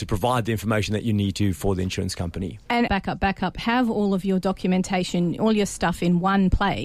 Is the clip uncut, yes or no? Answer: no